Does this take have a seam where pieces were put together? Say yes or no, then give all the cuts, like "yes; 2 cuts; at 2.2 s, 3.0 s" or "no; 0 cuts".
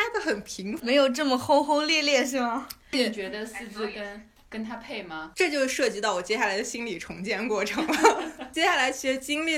no; 0 cuts